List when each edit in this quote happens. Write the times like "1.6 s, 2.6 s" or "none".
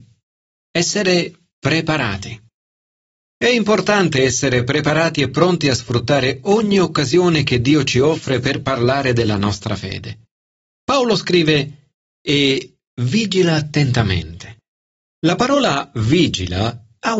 12.0 s